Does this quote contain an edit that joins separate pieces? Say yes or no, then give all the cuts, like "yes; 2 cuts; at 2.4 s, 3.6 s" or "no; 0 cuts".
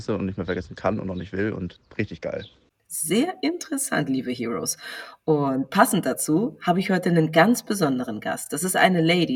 no; 0 cuts